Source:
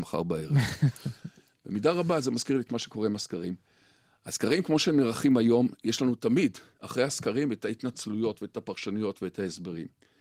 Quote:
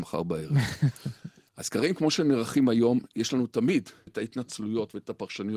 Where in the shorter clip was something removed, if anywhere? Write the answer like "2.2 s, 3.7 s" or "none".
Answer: 1.5 s, 4.1 s